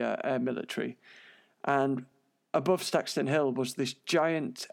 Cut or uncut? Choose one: uncut